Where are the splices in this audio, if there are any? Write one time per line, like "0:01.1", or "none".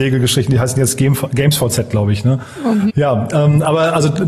0:02.9